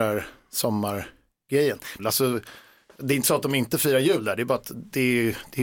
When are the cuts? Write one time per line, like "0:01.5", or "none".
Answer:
0:02.0